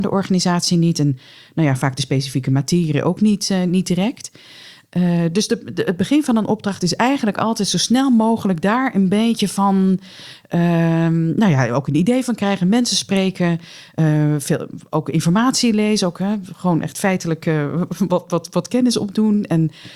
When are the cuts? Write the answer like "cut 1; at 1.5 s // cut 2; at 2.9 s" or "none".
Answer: none